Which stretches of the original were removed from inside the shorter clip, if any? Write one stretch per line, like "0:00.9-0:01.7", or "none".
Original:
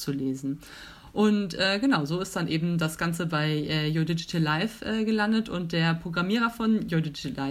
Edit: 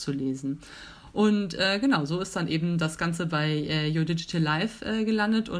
none